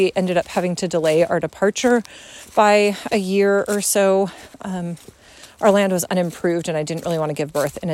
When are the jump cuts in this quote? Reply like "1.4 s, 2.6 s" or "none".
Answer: none